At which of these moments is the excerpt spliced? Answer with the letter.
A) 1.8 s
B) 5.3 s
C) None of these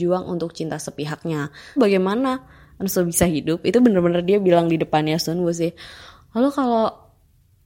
A